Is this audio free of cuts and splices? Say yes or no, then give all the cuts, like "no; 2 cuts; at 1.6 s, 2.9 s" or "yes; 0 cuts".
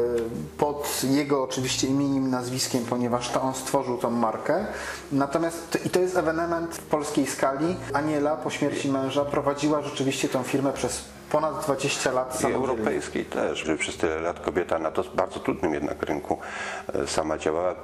no; 1 cut; at 13.6 s